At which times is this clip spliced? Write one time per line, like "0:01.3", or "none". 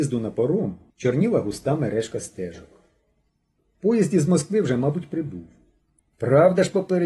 0:03.6
0:06.0